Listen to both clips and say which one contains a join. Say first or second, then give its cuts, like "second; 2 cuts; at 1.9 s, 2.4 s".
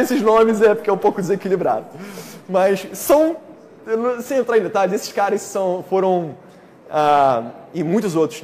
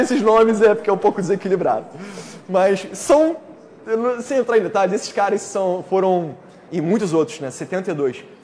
second; 1 cut; at 6.7 s